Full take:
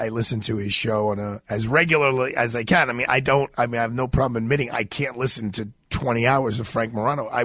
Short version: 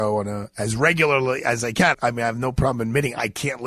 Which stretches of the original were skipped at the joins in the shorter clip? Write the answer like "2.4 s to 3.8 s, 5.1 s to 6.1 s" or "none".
2.9 s to 3.5 s